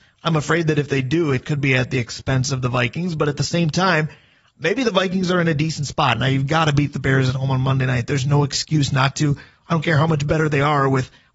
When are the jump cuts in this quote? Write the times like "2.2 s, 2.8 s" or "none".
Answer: none